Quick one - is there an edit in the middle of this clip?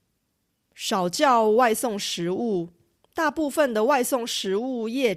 yes; 1 cut; at 3.0 s

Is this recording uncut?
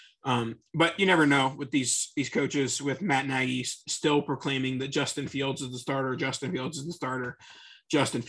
yes; 0 cuts

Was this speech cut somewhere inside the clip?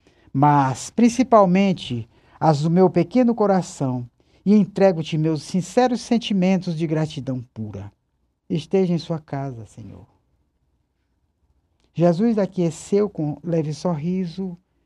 no; 0 cuts

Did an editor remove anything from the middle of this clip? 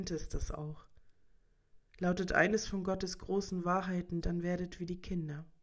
yes; 1 cut; at 4.2 s

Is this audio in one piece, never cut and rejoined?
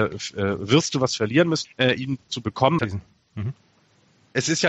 no; 2 cuts; at 1.6 s, 2.8 s

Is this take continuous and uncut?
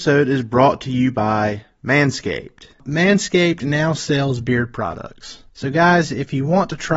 no; 1 cut; at 5.5 s

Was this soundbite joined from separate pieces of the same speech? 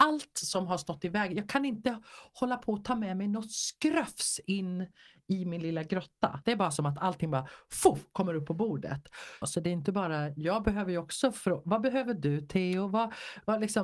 yes; 2 cuts; at 6.4 s, 9.4 s

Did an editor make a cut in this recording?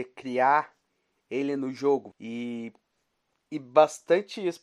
yes; 1 cut; at 2.1 s

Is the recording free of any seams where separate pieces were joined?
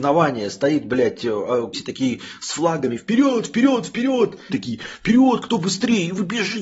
no; 2 cuts; at 1.7 s, 4.5 s

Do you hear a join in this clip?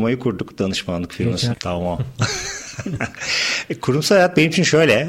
yes; 1 cut; at 1.5 s

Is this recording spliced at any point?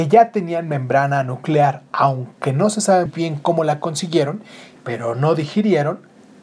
yes; 2 cuts; at 3.1 s, 4.8 s

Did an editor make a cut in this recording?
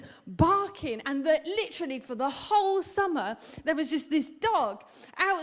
no; 0 cuts

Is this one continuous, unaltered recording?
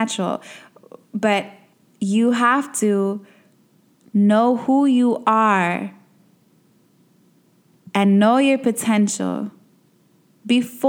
yes; 0 cuts

